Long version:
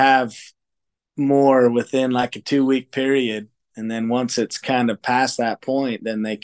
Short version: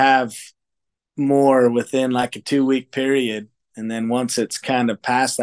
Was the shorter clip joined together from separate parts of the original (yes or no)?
no